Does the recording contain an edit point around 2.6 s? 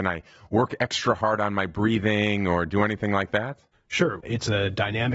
no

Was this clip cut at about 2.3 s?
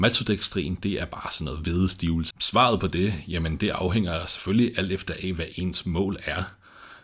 yes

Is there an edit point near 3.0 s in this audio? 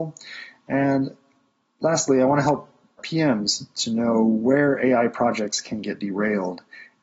yes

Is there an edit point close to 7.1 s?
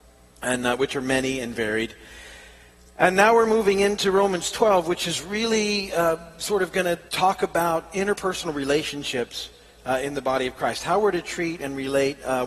yes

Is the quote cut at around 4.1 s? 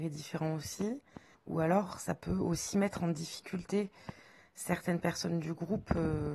no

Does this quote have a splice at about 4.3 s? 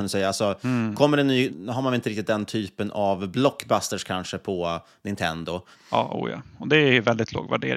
no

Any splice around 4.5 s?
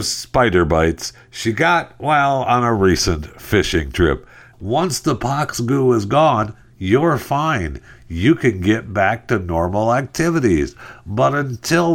yes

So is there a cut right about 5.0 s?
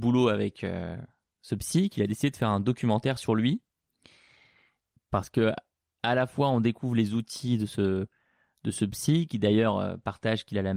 yes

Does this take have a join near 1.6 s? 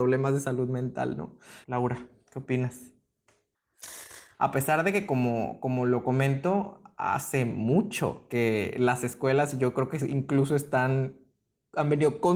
yes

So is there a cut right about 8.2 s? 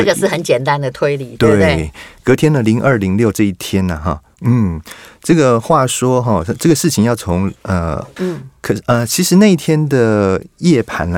yes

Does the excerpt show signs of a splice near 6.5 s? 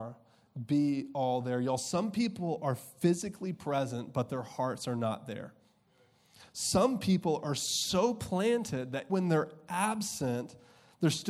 no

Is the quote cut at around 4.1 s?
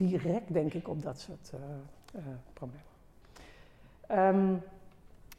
no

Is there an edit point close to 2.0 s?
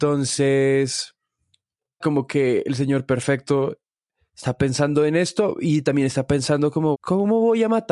yes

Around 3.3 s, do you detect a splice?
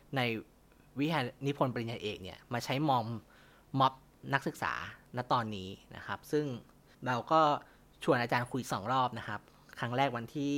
no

